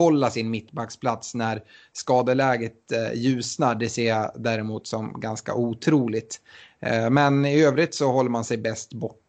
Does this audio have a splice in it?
no; 0 cuts

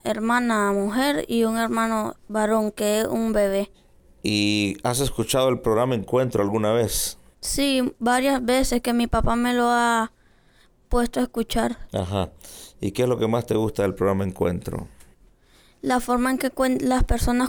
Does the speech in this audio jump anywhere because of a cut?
yes; 1 cut; at 2.2 s

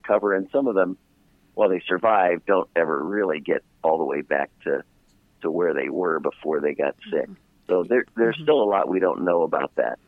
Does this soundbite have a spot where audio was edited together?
no; 0 cuts

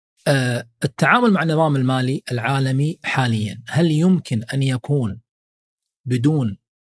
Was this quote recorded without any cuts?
yes; 0 cuts

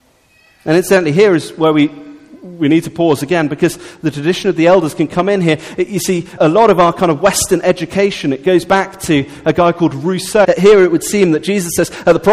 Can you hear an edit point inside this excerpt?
yes; 2 cuts; at 6.4 s, 10.4 s

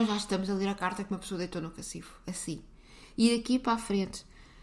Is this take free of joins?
yes; 0 cuts

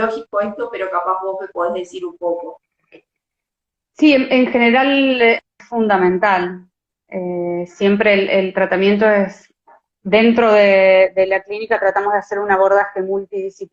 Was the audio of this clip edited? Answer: no; 0 cuts

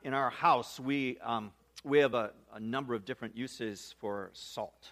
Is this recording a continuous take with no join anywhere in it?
yes; 0 cuts

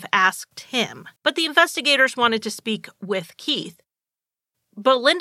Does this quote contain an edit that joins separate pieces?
yes; 1 cut; at 1.2 s

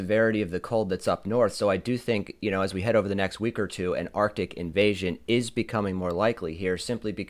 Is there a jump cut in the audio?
no; 0 cuts

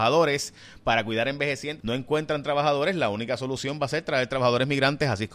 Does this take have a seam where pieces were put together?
yes; 1 cut; at 1.8 s

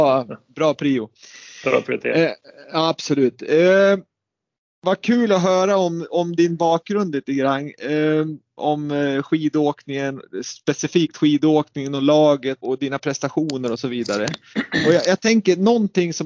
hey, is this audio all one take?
no; 2 cuts; at 8.6 s, 12.6 s

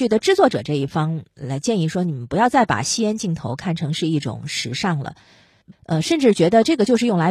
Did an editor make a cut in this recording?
yes; 1 cut; at 5.7 s

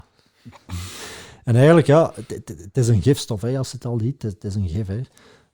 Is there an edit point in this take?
no; 0 cuts

